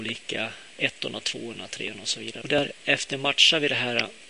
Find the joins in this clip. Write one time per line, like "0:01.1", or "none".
0:02.4